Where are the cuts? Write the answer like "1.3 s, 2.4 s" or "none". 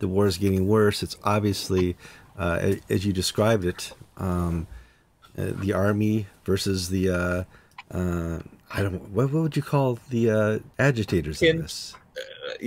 10.7 s